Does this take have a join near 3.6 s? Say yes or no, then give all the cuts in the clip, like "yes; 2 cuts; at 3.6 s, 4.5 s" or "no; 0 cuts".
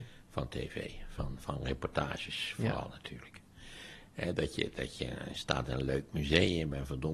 no; 0 cuts